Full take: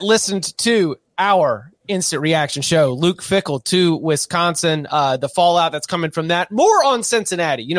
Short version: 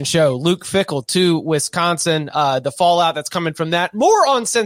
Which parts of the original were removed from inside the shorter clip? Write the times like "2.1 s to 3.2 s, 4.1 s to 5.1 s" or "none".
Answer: none

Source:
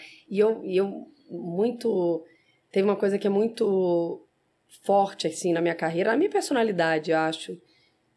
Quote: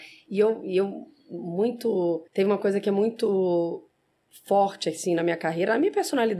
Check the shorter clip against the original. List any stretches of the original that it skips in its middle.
2.3 s to 2.7 s

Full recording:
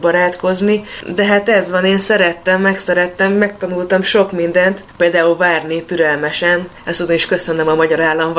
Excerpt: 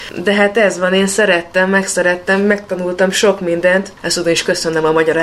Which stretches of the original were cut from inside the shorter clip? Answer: 4.9 s to 6.8 s

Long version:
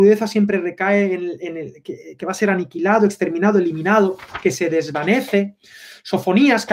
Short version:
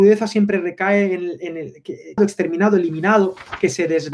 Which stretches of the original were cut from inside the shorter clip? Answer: 2.2 s to 3.0 s

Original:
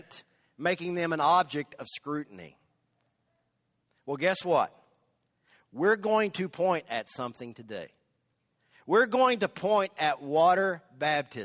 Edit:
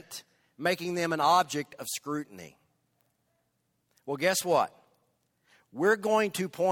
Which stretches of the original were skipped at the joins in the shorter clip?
none

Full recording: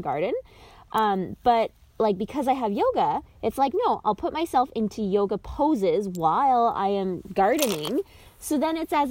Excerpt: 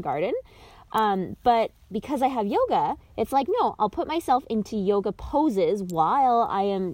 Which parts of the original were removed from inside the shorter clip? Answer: 1.9 s to 2.2 s

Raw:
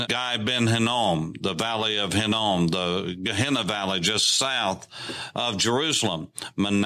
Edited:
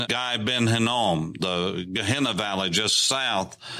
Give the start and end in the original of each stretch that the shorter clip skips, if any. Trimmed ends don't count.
1.4 s to 2.7 s

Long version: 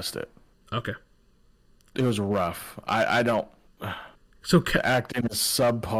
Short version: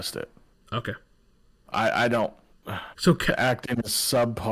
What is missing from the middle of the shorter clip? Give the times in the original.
1.7 s to 2.8 s, 4.1 s to 4.4 s

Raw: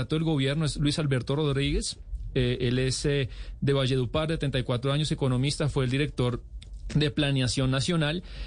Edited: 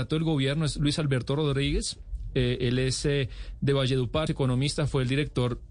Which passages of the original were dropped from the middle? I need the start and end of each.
4.3 s to 5.1 s

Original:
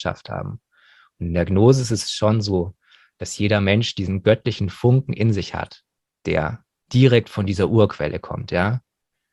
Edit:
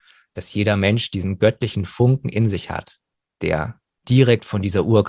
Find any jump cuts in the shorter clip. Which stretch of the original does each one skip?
none

